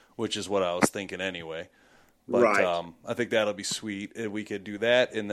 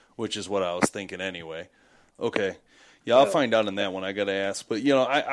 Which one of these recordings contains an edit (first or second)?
second